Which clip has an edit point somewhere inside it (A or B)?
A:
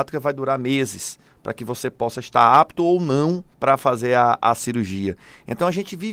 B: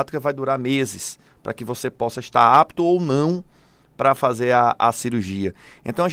A